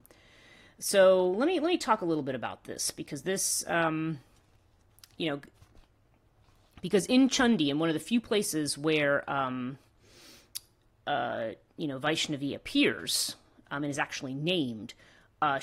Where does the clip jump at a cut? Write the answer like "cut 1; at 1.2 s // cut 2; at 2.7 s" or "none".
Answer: none